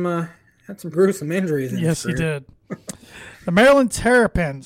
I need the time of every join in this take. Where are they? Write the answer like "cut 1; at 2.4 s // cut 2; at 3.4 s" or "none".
cut 1; at 0.9 s